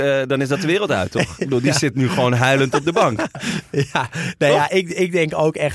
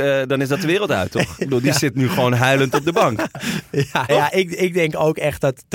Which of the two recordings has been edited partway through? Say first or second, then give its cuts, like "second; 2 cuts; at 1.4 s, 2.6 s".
second; 1 cut; at 4.1 s